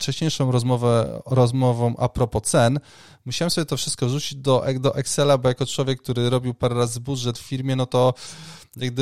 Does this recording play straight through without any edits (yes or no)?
yes